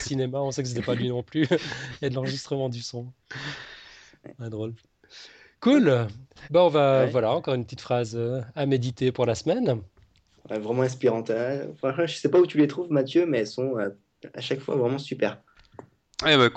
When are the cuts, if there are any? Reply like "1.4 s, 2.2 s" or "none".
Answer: none